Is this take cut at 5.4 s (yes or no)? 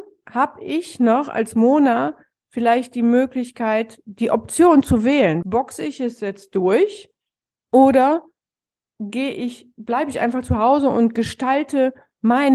yes